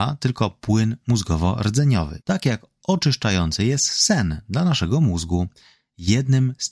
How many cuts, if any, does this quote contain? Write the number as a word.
one